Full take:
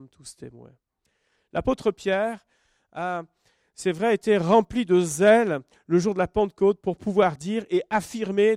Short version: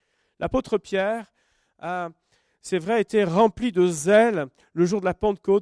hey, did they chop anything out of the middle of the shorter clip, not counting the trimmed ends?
no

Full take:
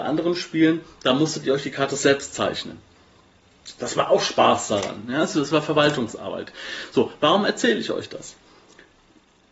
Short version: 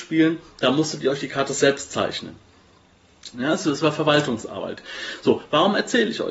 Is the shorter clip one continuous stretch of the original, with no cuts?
no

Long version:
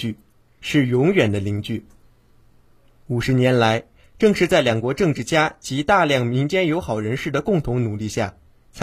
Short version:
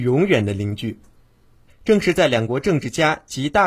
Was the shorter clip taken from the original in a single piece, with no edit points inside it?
no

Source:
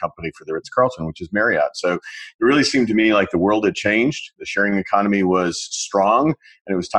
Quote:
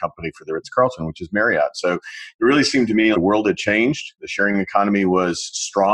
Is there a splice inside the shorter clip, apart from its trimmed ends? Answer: yes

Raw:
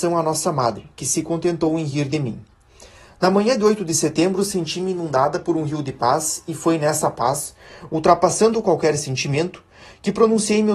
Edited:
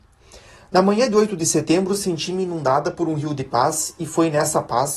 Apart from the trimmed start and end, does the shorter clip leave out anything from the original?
no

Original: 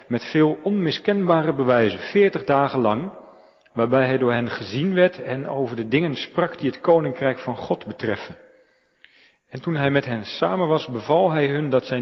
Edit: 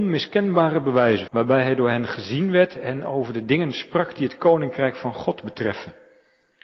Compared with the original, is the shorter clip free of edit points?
no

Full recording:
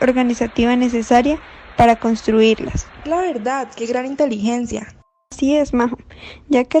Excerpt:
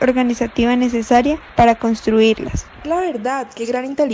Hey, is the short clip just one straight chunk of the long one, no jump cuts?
no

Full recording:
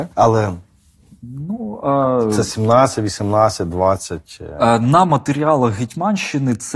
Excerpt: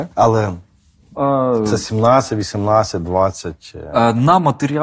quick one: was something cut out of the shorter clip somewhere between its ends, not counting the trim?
yes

